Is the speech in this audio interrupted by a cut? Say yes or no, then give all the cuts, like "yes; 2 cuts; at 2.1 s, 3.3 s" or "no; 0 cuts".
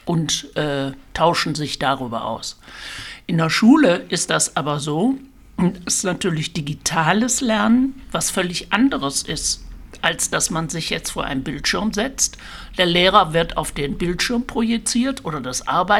no; 0 cuts